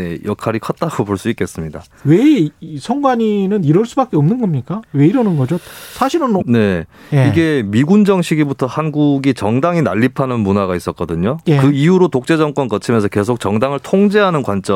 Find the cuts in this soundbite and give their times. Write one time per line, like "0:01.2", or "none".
0:06.4